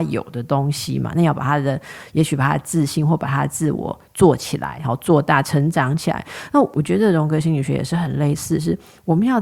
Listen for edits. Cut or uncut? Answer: uncut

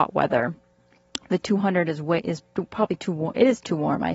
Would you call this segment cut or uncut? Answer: uncut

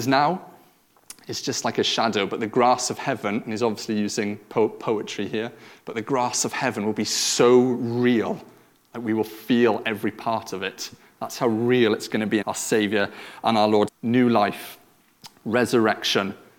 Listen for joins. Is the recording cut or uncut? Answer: cut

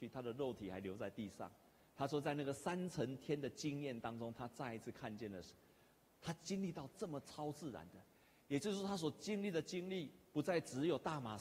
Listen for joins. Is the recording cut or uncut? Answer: uncut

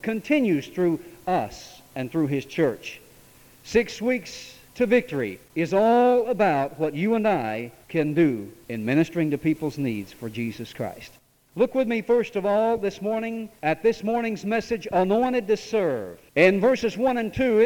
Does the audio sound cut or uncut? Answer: uncut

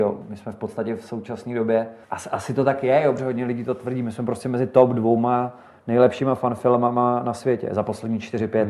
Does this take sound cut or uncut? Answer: cut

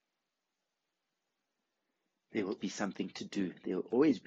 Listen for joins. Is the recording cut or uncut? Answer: cut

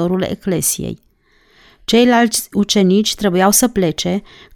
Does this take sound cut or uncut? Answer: uncut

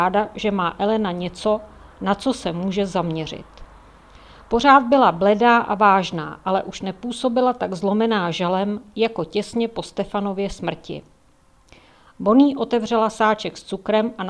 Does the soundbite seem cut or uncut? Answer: uncut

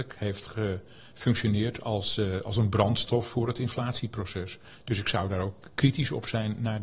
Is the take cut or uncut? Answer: uncut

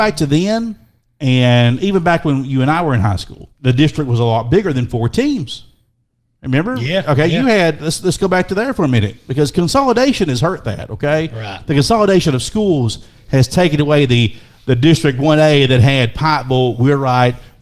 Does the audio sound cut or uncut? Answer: cut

